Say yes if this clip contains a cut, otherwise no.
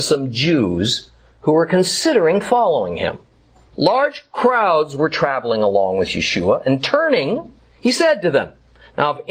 yes